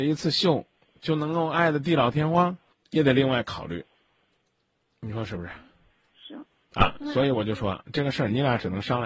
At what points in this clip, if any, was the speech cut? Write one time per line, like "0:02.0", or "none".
none